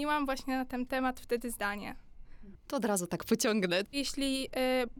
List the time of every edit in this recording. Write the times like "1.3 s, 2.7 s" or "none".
2.6 s, 3.8 s